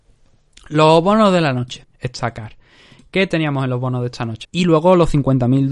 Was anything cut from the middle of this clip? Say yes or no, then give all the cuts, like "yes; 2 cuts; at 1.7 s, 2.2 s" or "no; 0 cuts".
yes; 2 cuts; at 1.8 s, 4.4 s